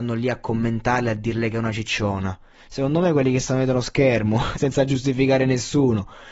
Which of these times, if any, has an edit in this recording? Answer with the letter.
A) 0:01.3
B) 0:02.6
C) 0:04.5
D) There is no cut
C